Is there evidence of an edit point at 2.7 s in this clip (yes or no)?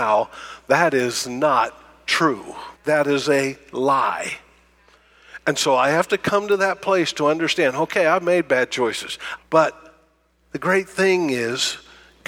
yes